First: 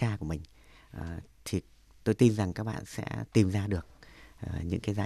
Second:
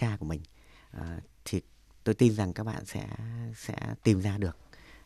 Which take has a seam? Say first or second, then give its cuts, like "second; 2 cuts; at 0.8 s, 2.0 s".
first; 1 cut; at 2.9 s